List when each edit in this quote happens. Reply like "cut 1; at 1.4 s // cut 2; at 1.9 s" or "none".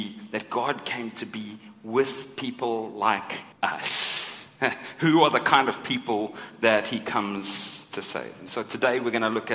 cut 1; at 3.5 s